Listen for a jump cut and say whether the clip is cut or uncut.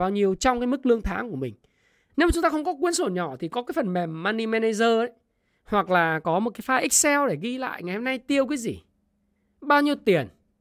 cut